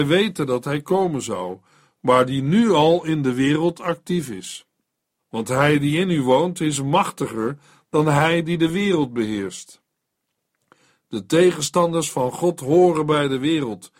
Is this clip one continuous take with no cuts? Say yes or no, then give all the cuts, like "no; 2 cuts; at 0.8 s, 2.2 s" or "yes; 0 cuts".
no; 1 cut; at 5.2 s